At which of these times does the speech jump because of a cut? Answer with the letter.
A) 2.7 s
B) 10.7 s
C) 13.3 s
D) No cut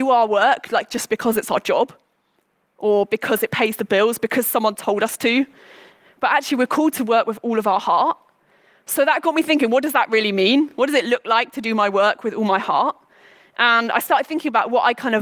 D